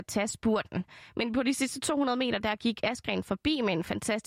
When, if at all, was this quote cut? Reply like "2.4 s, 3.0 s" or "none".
none